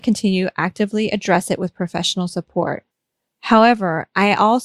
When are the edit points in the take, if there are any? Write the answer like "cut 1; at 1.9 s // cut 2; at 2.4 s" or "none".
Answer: none